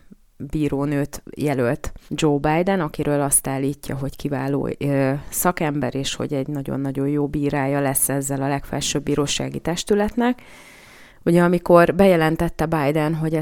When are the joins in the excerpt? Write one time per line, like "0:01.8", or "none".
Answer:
0:02.1
0:11.1